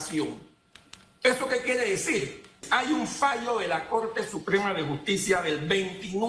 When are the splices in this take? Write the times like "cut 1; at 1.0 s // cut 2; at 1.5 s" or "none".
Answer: cut 1; at 2.6 s